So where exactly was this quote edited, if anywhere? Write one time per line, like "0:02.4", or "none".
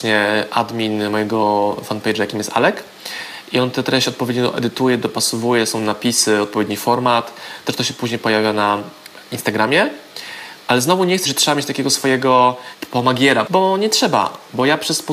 0:11.3
0:13.5